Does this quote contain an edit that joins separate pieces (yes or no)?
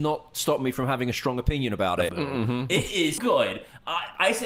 yes